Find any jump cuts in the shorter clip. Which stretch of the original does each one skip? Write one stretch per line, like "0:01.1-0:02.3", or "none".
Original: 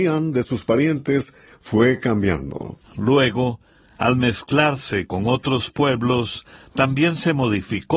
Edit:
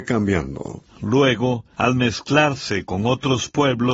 0:03.7-0:03.9